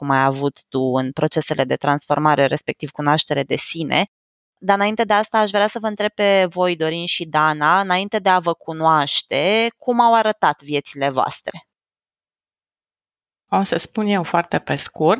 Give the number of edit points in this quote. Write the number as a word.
zero